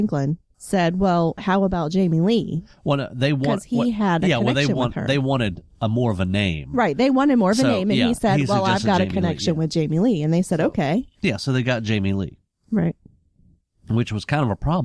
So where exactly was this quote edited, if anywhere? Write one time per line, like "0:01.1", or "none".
none